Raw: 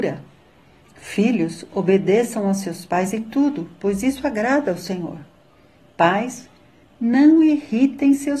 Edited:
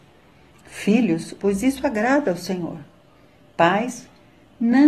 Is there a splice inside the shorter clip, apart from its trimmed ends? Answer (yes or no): yes